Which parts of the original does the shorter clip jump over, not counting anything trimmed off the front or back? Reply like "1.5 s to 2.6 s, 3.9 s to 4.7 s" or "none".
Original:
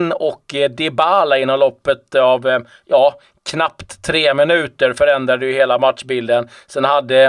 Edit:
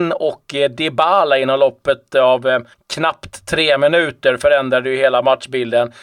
2.7 s to 3.3 s